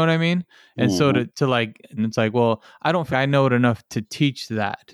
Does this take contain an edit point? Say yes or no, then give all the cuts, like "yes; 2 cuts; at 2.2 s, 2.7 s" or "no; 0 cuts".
yes; 2 cuts; at 2.0 s, 3.1 s